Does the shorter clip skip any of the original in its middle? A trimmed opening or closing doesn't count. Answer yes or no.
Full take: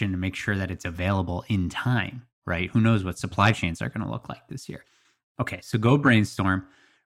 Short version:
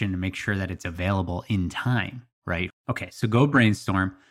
yes